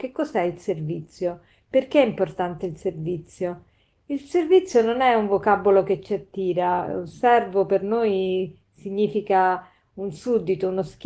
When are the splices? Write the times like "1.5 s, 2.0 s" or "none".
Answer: none